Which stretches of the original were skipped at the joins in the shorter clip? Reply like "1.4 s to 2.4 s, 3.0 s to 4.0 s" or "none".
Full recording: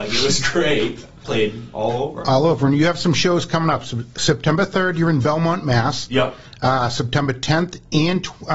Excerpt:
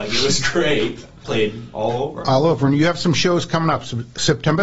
none